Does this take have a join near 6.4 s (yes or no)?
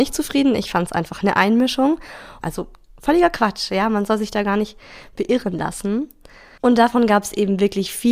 no